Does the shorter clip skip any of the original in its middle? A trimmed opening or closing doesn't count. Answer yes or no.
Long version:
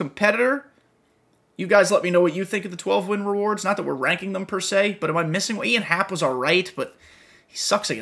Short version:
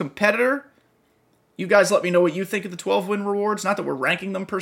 no